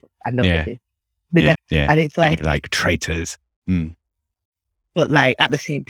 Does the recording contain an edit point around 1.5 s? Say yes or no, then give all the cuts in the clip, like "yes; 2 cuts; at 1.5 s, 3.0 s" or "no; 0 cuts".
yes; 2 cuts; at 1.5 s, 3.5 s